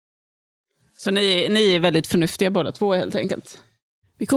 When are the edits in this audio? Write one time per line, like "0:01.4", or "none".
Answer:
none